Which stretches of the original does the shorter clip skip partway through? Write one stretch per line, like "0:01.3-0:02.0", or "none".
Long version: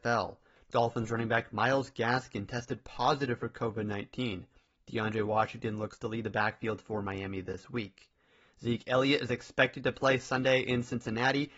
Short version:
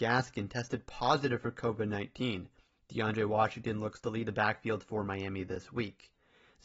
none